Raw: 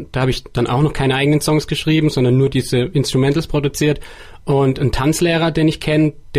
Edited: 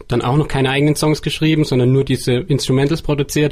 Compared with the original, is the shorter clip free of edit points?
yes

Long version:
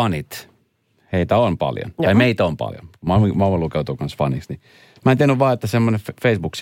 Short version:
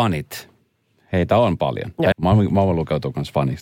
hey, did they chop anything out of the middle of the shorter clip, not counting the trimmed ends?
yes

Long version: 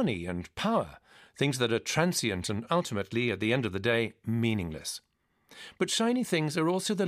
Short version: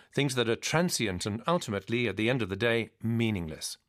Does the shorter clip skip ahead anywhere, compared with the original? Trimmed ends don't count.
no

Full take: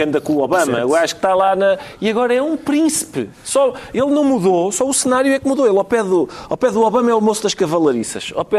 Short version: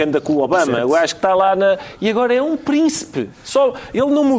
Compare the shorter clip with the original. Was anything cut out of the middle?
no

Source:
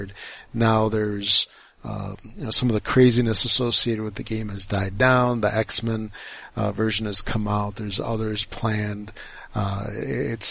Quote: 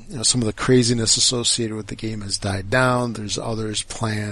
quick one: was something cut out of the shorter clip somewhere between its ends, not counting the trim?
yes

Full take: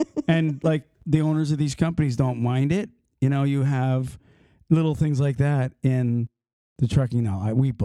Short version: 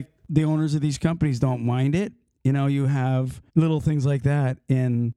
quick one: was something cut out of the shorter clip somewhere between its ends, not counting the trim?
yes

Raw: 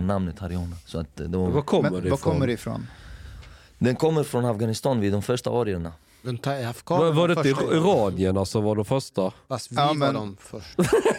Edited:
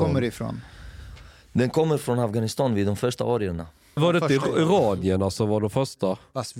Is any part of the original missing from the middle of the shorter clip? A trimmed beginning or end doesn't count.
yes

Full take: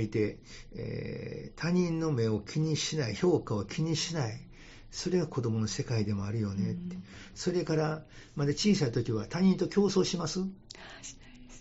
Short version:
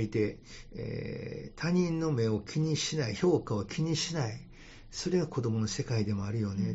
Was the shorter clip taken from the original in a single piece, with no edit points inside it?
yes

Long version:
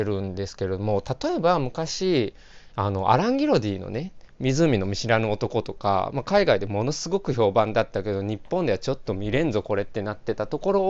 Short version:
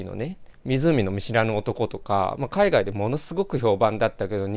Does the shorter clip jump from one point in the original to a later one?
no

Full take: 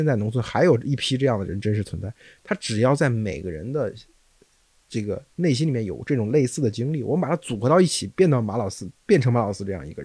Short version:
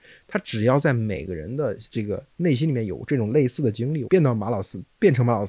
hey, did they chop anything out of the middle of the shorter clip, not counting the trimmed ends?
yes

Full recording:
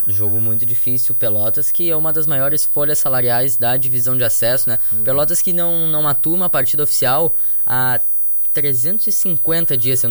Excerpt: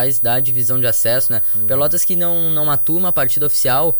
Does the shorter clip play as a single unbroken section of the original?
yes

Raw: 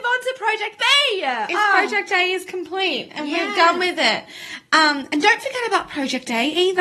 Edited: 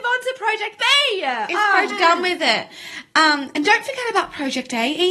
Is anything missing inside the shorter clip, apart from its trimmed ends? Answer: yes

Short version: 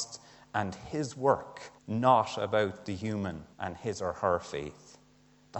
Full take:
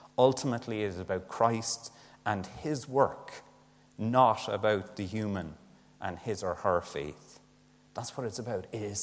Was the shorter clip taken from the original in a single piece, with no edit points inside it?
no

